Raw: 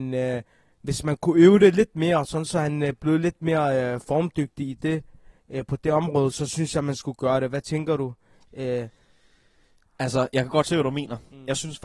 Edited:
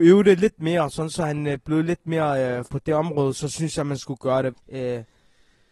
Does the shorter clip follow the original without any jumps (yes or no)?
no